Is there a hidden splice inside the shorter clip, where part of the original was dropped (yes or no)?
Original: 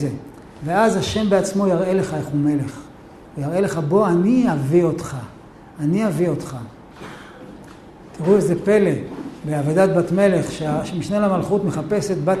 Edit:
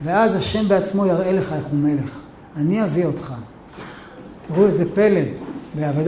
yes